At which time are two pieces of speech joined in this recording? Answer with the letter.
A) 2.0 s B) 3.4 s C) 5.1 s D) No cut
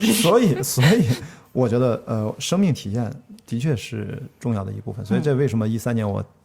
D